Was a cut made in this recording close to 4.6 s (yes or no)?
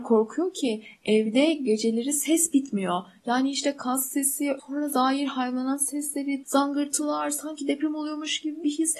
yes